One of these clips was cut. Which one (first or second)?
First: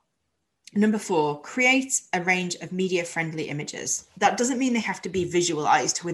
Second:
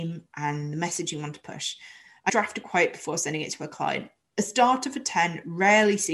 second